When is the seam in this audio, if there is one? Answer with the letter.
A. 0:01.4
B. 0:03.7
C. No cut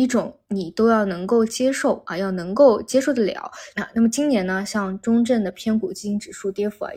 B